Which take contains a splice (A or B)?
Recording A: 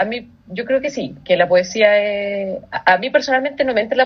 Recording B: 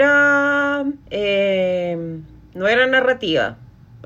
B